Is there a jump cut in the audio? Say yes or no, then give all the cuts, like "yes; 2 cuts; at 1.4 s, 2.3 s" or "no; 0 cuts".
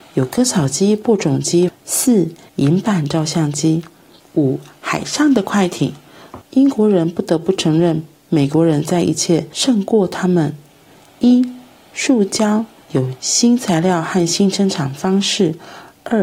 yes; 2 cuts; at 1.7 s, 6.4 s